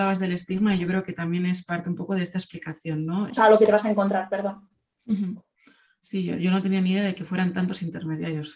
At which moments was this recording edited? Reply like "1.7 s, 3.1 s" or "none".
3.3 s